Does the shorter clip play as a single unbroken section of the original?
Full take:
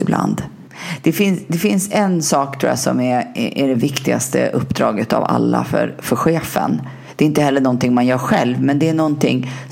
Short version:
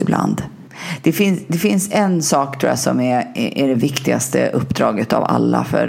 yes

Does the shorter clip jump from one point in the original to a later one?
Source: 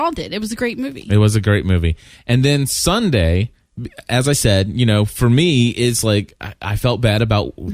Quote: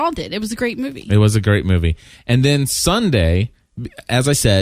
no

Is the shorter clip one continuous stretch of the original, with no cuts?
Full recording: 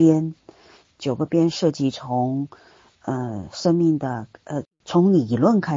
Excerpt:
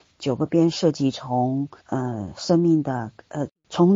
no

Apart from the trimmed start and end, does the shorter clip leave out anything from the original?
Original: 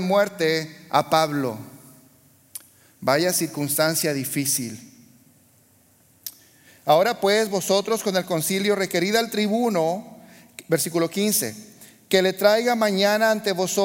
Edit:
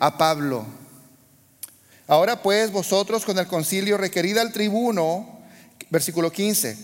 yes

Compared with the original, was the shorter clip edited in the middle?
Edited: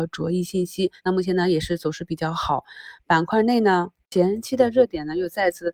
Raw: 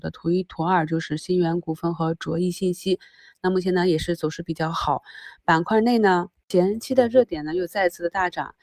yes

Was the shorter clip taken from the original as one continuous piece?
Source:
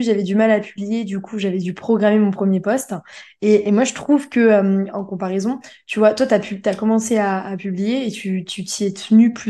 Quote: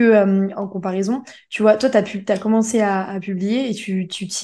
yes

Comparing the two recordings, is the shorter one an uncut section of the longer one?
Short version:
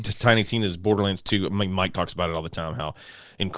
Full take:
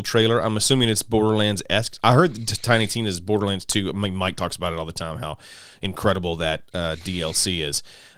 yes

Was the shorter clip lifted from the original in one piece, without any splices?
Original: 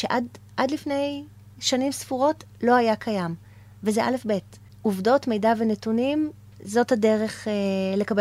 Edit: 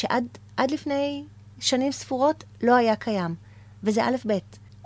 yes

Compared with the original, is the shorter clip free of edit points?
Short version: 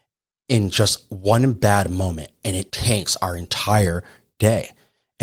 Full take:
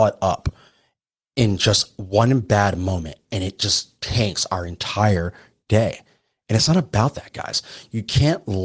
no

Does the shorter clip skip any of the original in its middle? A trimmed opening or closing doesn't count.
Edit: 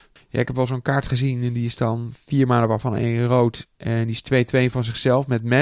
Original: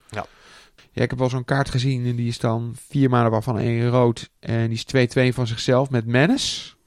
no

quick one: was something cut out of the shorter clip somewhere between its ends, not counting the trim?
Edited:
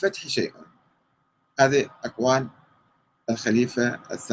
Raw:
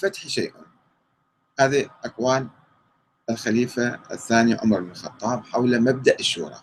no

